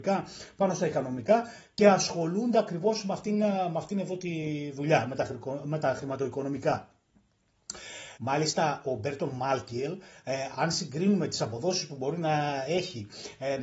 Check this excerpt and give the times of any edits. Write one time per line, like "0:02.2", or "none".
0:08.2
0:10.5